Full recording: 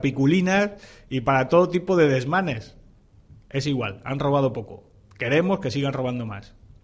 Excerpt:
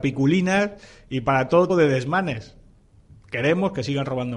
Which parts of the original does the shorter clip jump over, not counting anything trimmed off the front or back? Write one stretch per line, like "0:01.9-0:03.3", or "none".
0:01.7-0:01.9
0:03.4-0:05.1